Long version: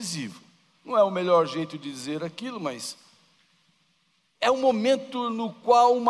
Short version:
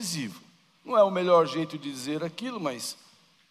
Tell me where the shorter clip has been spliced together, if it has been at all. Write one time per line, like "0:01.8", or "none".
none